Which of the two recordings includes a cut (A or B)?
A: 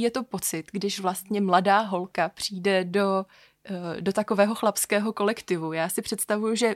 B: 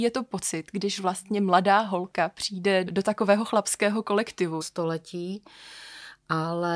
B